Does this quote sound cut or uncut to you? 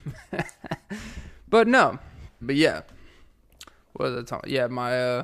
cut